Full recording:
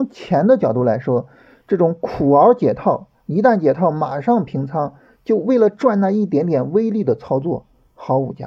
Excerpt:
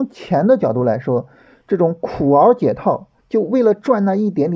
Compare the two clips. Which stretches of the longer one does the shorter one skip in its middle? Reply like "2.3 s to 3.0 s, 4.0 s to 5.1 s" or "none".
3.2 s to 5.1 s